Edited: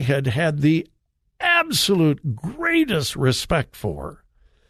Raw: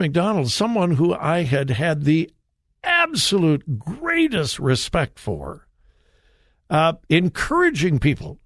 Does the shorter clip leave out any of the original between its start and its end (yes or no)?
no